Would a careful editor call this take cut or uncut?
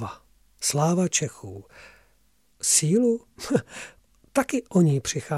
cut